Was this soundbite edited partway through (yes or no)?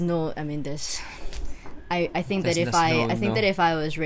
no